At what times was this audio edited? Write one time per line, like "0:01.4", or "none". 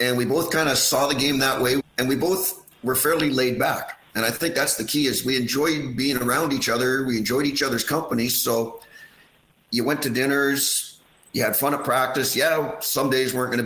0:01.8